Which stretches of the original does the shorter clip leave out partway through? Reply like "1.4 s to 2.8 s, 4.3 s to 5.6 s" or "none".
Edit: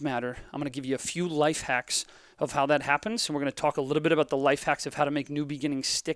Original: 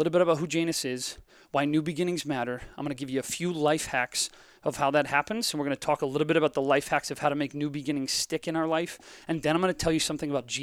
none